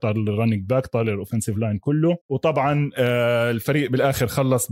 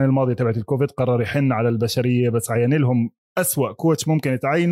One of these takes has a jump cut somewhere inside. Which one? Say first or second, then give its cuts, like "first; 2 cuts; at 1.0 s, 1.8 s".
first; 1 cut; at 2.2 s